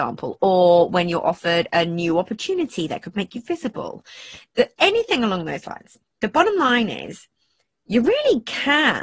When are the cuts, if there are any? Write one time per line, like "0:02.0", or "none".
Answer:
none